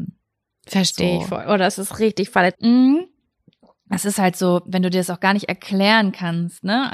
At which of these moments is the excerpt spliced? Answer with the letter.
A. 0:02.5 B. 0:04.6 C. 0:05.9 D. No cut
A